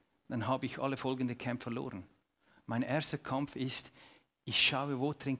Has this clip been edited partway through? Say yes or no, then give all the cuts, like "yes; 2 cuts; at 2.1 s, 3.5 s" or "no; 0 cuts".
yes; 1 cut; at 1.6 s